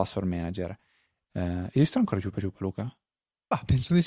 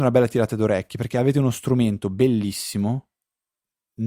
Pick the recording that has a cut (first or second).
first